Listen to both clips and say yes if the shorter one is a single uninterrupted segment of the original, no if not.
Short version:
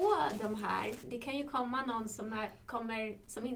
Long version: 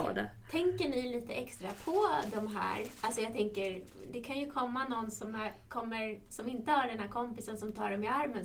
no